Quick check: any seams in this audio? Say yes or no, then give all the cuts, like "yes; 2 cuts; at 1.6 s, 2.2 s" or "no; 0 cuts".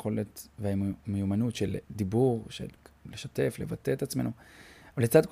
no; 0 cuts